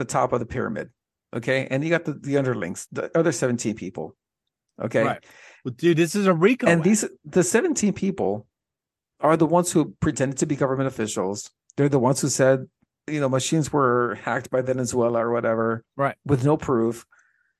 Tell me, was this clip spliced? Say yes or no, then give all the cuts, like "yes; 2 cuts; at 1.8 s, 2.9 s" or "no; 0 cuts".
yes; 1 cut; at 2.9 s